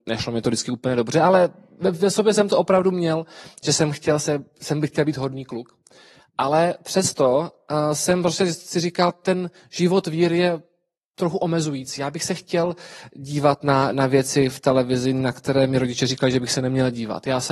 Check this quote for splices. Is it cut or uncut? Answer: uncut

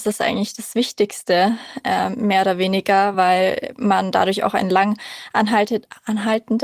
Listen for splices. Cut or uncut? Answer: uncut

